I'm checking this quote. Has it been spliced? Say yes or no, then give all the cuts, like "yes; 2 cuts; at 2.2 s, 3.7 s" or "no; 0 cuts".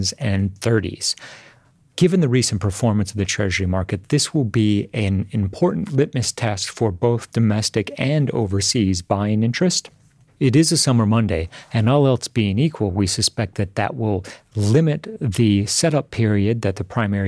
no; 0 cuts